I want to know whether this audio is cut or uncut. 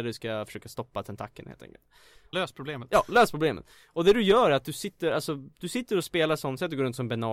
cut